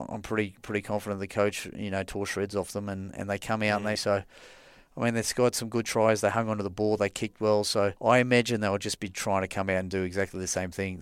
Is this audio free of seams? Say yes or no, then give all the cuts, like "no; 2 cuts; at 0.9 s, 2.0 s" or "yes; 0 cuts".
no; 2 cuts; at 4.0 s, 8.0 s